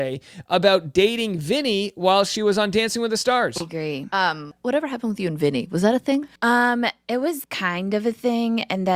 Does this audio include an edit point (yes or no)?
yes